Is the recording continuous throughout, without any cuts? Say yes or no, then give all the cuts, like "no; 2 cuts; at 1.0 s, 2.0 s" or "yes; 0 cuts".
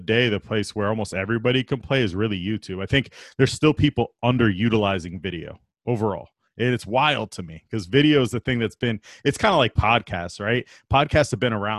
yes; 0 cuts